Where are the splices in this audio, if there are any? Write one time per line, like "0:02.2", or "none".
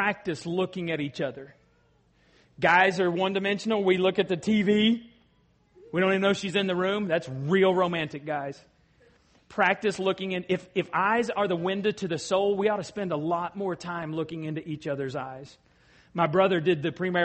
none